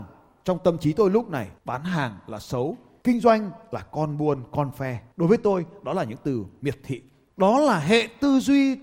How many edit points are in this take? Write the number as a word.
one